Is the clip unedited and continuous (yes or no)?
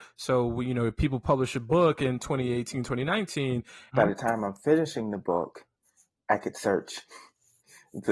no